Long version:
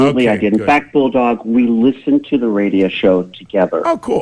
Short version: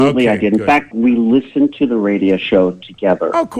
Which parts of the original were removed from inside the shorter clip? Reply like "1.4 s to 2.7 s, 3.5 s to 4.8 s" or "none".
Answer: 0.9 s to 1.4 s